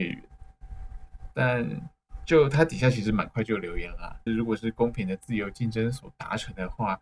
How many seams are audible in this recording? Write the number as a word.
one